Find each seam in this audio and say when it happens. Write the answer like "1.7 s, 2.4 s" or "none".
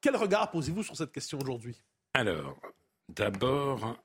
none